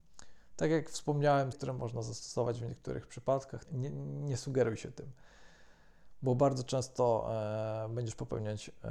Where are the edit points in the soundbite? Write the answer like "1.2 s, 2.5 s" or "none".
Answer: 1.5 s, 3.6 s